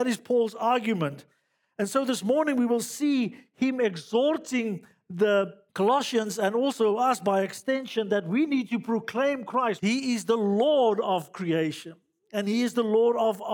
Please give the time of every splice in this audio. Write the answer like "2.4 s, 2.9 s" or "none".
5.7 s, 9.8 s